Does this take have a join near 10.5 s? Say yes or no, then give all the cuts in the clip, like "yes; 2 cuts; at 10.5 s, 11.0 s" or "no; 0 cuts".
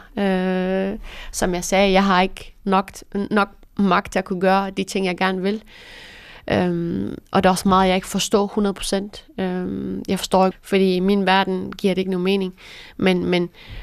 yes; 1 cut; at 10.5 s